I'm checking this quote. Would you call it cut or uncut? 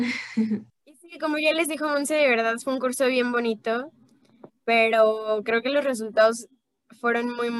cut